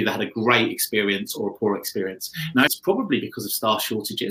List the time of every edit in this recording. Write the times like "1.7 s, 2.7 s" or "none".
2.7 s